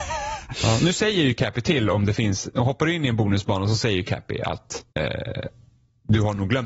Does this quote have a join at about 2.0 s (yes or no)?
no